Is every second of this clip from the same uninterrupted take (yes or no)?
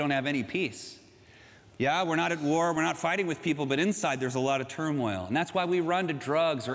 yes